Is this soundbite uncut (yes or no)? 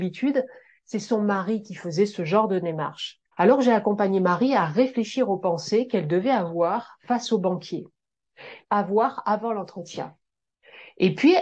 no